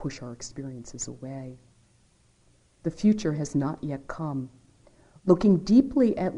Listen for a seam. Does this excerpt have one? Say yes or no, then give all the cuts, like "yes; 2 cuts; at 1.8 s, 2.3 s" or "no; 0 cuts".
yes; 1 cut; at 2.8 s